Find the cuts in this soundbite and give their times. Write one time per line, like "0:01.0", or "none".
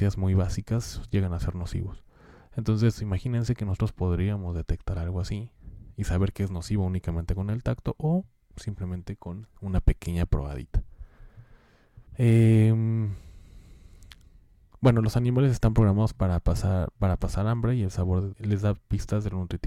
0:12.1
0:18.3